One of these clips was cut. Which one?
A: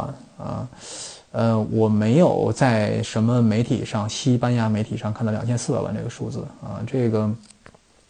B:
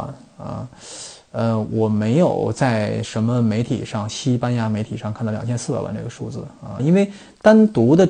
B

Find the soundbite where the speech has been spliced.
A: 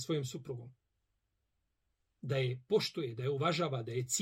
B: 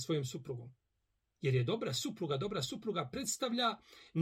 B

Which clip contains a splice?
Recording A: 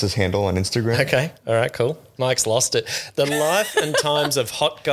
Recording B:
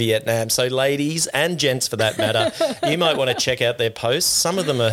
A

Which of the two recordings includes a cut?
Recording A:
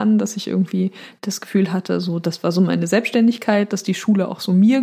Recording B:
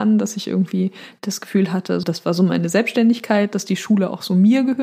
B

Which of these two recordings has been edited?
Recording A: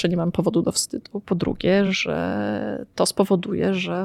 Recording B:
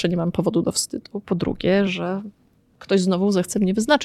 B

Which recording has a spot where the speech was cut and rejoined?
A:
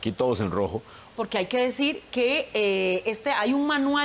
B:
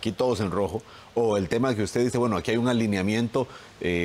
A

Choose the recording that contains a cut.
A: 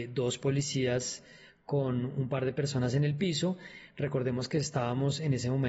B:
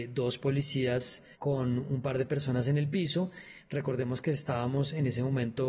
B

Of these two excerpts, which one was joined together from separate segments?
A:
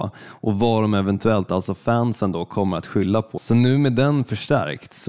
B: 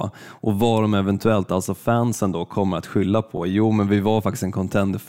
A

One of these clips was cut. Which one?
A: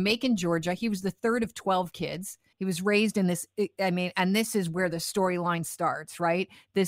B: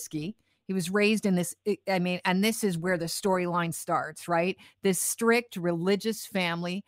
A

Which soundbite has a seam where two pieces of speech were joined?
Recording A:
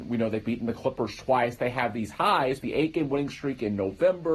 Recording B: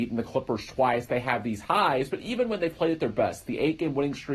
A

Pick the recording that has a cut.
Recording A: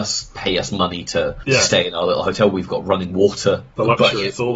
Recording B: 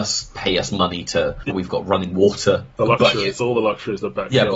B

